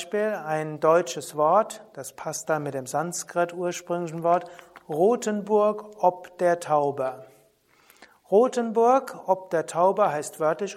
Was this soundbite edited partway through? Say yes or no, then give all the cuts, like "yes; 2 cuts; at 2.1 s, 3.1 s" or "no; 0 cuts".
no; 0 cuts